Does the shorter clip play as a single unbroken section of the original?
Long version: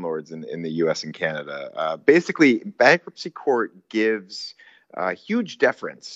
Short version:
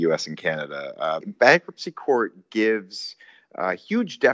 no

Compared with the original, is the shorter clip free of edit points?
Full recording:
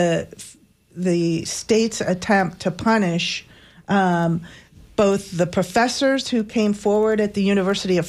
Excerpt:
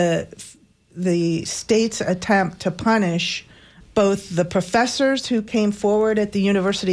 no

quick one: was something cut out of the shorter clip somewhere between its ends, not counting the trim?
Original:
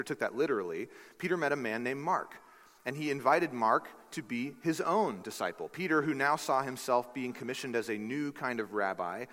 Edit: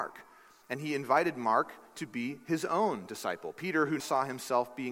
yes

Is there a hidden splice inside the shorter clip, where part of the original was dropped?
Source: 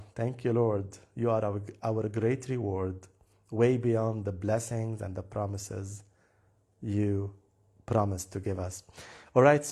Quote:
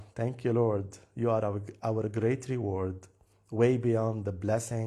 no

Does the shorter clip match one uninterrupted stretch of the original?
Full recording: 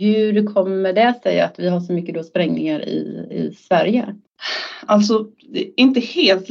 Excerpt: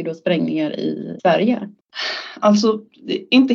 no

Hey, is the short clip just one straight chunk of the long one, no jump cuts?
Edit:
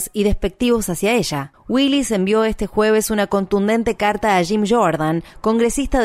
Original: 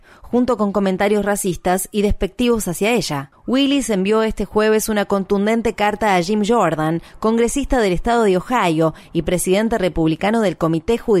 yes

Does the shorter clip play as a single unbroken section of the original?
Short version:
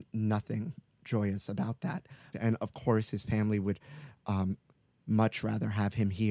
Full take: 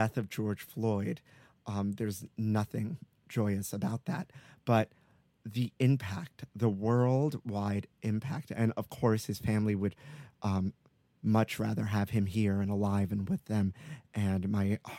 no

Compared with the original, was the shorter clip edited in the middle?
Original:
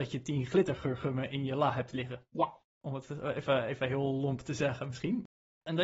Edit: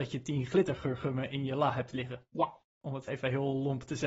yes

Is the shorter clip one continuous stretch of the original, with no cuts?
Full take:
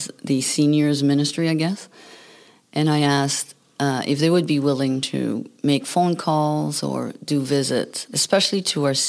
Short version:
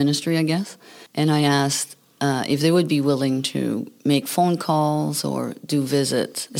no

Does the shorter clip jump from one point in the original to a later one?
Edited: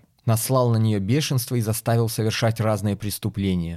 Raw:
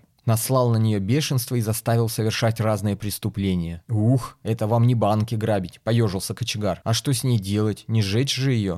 no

